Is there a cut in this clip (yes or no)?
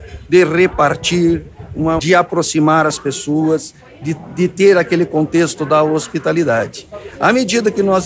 yes